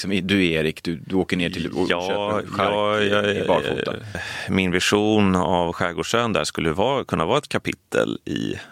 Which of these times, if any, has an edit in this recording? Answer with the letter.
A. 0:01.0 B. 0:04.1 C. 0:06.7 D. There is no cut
B